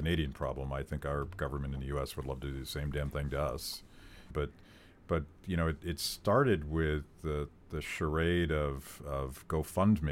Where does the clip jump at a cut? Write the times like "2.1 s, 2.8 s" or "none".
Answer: 4.3 s